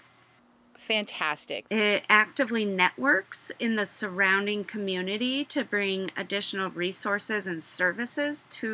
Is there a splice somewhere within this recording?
yes; 1 cut; at 1.7 s

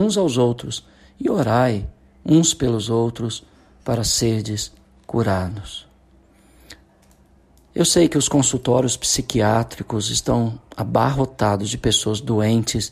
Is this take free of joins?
yes; 0 cuts

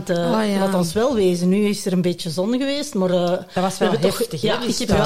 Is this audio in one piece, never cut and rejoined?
yes; 0 cuts

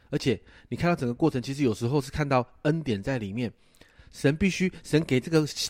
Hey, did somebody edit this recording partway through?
no; 0 cuts

